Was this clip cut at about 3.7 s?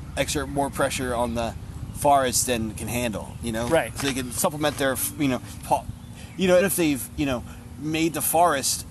no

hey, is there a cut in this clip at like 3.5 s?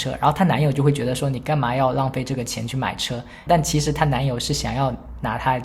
yes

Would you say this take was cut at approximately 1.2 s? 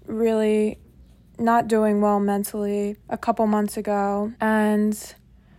no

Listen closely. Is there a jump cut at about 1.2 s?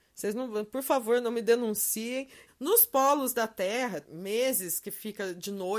no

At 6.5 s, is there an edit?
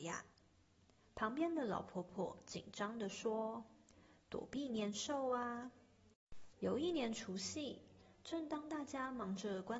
yes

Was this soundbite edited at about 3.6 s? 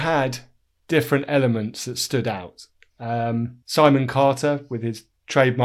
yes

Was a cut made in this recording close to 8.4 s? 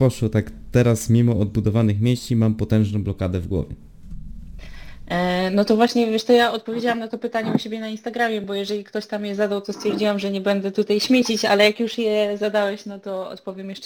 no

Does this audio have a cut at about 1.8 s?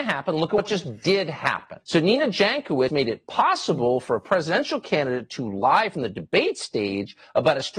yes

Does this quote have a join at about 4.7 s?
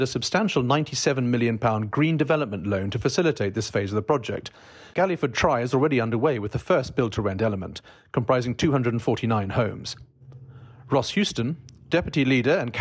no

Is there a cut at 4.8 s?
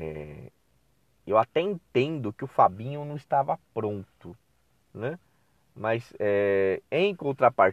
yes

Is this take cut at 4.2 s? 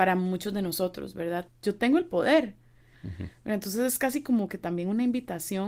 no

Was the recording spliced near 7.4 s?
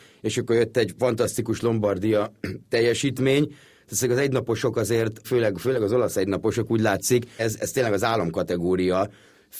yes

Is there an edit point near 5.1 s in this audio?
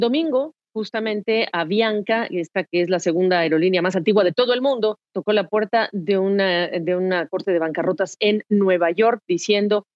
yes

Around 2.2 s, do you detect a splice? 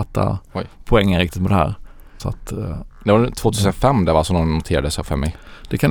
yes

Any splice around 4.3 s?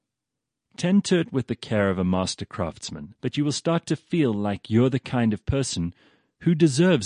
no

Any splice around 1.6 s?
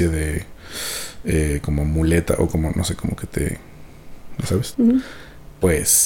no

